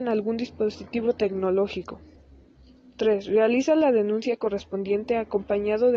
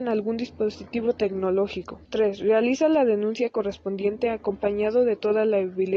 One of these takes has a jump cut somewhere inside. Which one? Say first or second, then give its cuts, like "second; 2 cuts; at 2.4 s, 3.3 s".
second; 1 cut; at 2.0 s